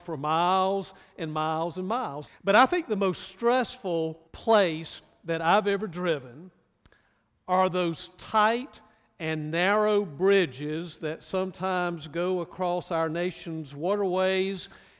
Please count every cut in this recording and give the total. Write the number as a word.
two